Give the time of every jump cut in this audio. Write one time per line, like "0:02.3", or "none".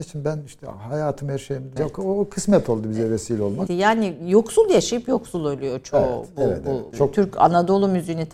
0:01.8
0:03.7
0:06.9

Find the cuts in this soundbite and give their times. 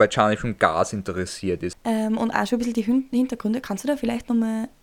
0:01.7

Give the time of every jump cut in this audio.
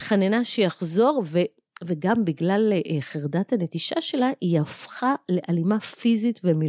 none

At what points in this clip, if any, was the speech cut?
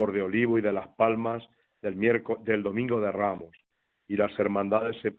none

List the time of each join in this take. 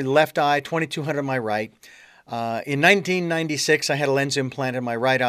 none

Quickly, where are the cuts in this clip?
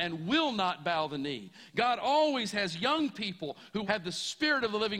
0:03.8

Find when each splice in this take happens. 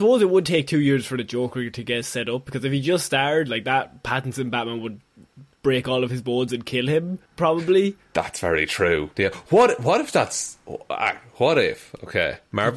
0:07.3
0:09.1

